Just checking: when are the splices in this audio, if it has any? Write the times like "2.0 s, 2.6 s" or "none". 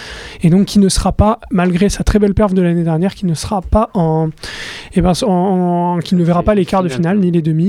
none